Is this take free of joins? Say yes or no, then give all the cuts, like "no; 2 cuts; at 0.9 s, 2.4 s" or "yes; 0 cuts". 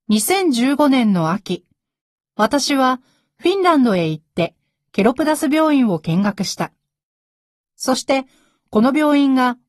yes; 0 cuts